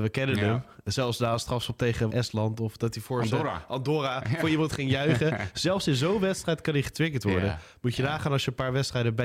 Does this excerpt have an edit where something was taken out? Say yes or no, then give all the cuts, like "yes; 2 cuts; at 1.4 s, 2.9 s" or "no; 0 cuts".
yes; 1 cut; at 2.1 s